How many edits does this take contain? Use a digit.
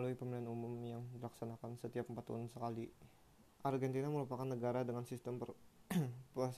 1